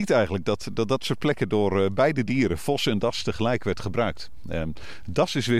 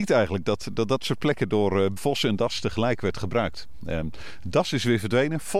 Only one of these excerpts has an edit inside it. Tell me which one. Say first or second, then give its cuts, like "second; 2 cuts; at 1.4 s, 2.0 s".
second; 1 cut; at 2.0 s